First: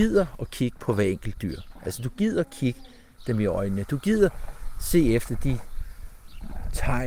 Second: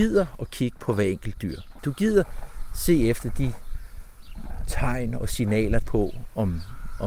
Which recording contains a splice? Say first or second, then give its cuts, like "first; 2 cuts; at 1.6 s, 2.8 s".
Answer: second; 2 cuts; at 1.8 s, 5.8 s